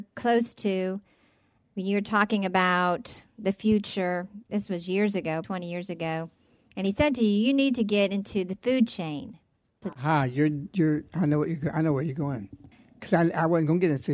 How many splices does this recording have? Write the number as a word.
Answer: two